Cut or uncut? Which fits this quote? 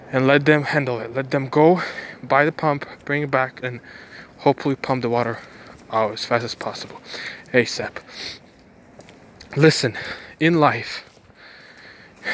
cut